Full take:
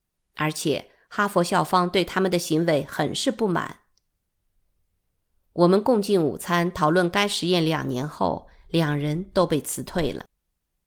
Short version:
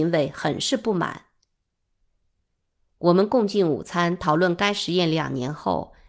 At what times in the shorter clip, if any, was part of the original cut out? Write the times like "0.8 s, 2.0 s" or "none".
none